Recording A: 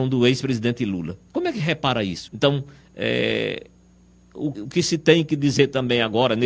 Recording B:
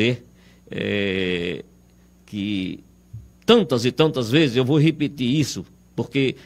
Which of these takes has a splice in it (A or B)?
A